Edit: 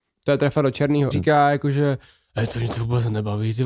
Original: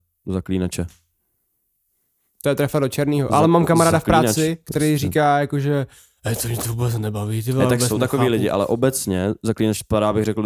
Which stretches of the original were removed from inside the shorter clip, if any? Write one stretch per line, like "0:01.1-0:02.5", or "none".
0:03.3-0:05.0